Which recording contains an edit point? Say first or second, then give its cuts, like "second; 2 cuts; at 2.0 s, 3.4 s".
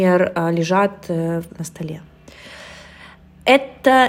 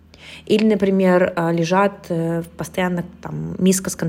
first; 1 cut; at 1.5 s